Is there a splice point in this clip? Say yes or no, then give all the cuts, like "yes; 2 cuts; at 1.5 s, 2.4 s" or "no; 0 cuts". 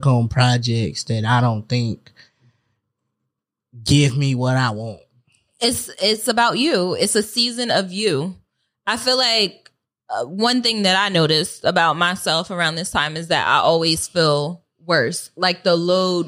no; 0 cuts